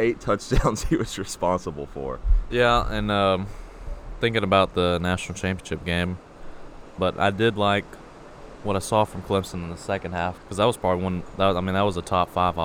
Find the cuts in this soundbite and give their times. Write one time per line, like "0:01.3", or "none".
0:02.5
0:07.0
0:10.4